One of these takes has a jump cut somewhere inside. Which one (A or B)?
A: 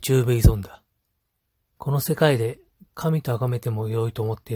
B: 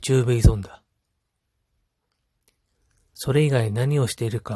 A